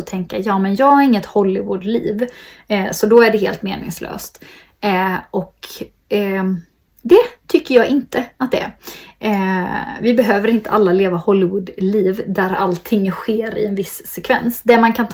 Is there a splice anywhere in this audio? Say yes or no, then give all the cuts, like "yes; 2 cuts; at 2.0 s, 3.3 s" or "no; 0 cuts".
no; 0 cuts